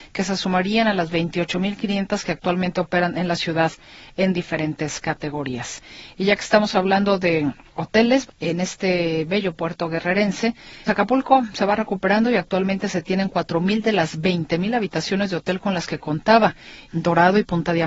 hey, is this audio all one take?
no; 3 cuts; at 8.3 s, 10.9 s, 16.9 s

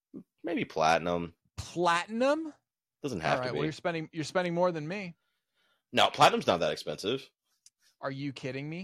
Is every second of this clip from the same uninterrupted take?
no; 1 cut; at 1.4 s

